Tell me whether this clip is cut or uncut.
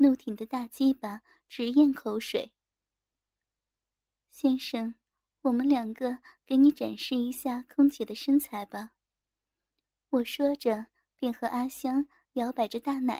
uncut